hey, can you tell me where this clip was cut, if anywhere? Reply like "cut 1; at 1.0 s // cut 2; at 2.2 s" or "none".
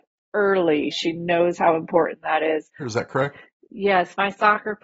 cut 1; at 0.9 s // cut 2; at 2.8 s